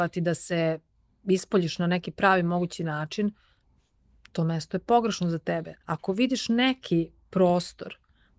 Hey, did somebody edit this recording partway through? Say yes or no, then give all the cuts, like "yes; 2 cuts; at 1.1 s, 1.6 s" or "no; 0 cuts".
yes; 1 cut; at 5.8 s